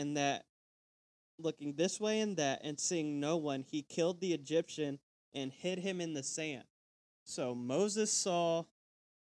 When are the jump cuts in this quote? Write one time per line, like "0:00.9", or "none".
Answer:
none